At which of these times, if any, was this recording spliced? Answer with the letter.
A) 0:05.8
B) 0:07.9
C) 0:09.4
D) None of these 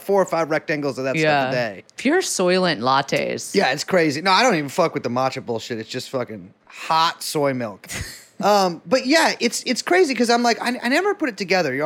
D